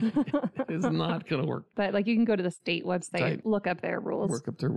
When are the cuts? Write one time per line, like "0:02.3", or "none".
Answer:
0:01.7
0:03.4